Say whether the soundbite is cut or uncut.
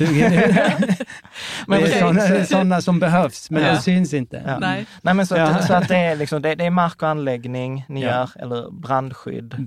uncut